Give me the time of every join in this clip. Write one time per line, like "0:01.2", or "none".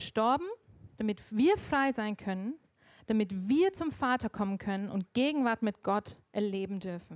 0:01.0